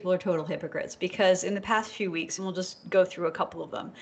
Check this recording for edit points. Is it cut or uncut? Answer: uncut